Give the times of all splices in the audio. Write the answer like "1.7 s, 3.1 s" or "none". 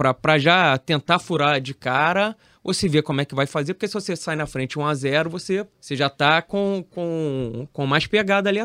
5.7 s